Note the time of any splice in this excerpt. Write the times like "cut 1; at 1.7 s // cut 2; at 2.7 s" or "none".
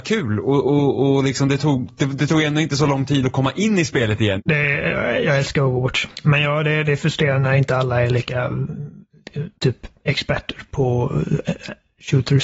cut 1; at 4.4 s // cut 2; at 6.1 s // cut 3; at 9.5 s